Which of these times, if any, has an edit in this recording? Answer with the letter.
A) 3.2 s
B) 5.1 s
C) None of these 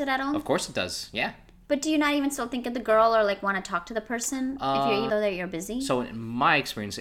B